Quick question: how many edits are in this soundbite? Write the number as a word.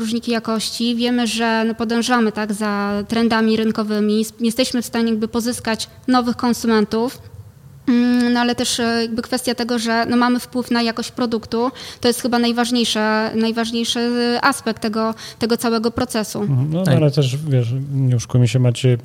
zero